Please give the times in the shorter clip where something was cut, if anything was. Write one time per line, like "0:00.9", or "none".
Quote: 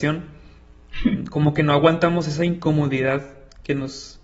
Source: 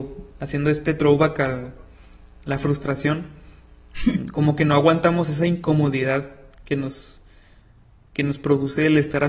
none